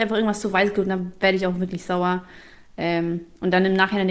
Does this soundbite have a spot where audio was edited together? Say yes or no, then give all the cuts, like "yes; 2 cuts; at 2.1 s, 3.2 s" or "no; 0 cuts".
no; 0 cuts